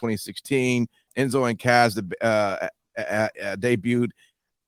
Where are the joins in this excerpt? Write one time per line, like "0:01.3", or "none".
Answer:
0:01.1